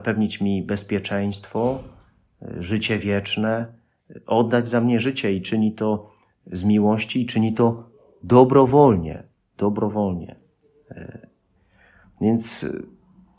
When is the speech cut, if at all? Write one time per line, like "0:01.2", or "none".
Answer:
none